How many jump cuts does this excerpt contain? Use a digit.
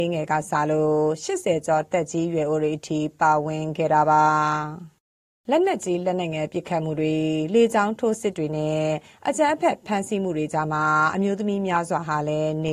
0